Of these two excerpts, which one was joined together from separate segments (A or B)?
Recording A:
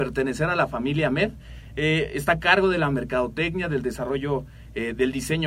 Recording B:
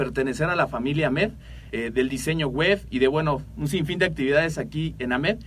B